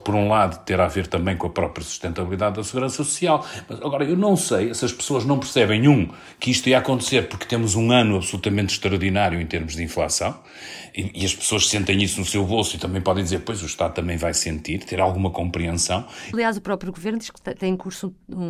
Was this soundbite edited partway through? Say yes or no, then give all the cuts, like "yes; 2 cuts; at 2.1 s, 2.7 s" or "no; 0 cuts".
yes; 1 cut; at 16.3 s